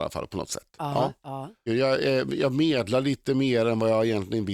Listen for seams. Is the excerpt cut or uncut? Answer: cut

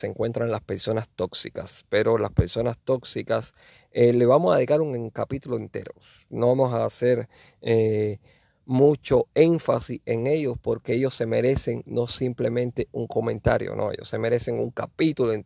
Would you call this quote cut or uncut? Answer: uncut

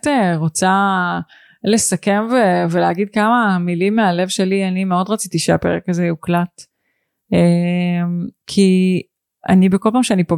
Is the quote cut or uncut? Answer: uncut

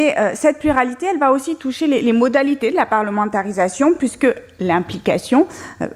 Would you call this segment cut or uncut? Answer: uncut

